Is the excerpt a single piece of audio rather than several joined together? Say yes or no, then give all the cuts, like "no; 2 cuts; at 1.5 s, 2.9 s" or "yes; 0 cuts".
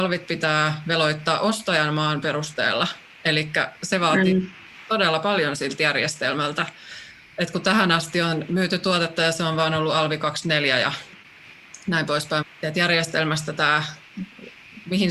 no; 1 cut; at 12.4 s